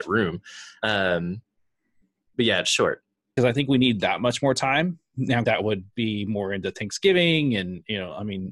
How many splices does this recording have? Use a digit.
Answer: 2